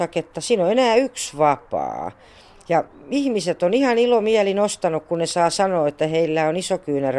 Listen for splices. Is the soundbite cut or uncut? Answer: uncut